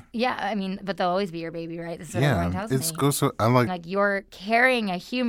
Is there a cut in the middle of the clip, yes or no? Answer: yes